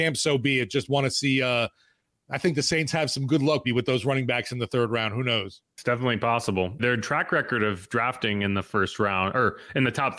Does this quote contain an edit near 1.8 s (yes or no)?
no